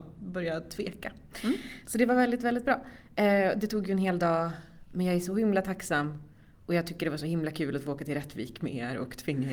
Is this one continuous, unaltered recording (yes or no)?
yes